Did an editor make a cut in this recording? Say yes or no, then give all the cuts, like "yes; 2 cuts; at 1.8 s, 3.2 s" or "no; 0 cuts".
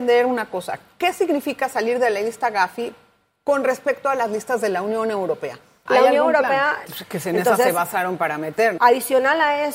yes; 3 cuts; at 5.9 s, 6.9 s, 8.8 s